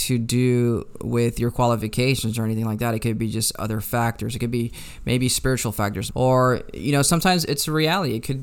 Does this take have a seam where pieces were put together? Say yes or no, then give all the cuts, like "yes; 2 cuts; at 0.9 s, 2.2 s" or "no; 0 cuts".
yes; 2 cuts; at 6.1 s, 7.4 s